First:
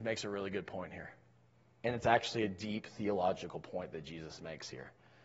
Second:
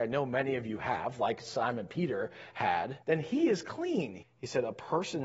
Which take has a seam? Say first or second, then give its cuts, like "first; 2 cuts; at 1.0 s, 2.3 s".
second; 2 cuts; at 3.0 s, 4.2 s